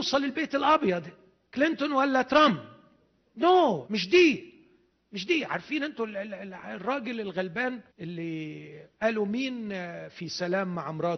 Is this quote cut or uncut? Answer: cut